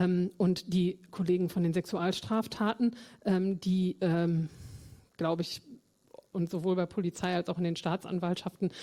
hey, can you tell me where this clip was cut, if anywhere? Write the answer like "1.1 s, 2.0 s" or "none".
6.3 s

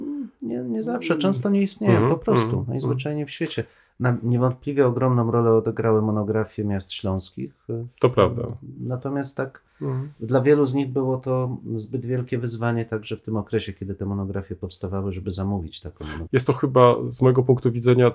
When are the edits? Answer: 16.3 s

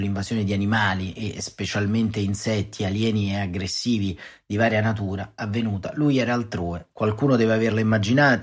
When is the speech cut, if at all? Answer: 6.9 s

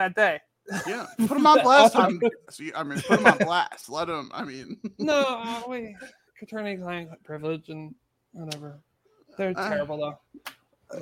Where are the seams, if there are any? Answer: 2.5 s

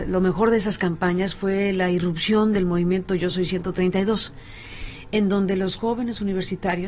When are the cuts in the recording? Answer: none

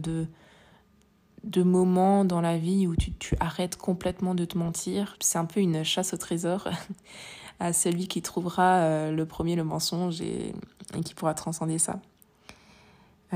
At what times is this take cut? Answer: 5.1 s

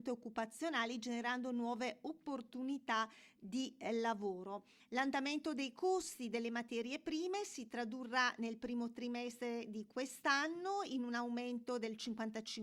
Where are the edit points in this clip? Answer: 4.8 s

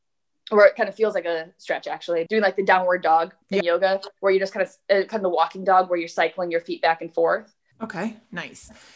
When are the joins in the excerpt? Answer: 2.3 s, 3.4 s, 7.7 s

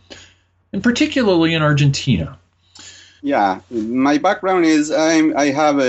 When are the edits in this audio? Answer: 3.2 s

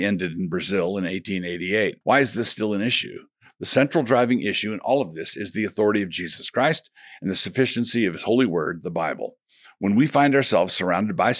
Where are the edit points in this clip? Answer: 2.0 s

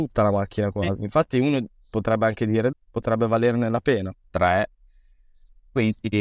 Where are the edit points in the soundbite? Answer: 2.7 s, 4.2 s

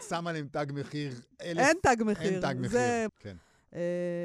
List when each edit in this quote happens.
1.3 s, 3.1 s

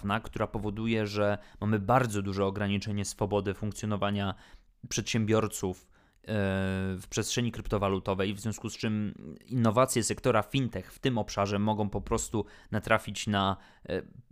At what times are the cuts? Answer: none

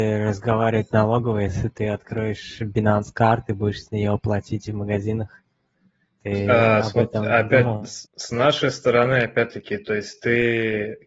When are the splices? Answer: 8.0 s

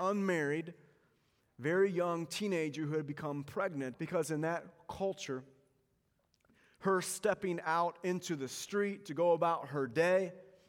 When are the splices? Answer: 3.9 s

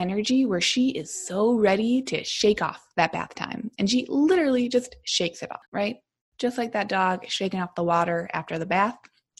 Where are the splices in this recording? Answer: 5.7 s

